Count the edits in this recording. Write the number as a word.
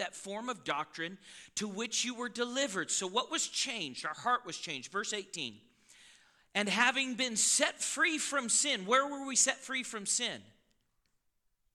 zero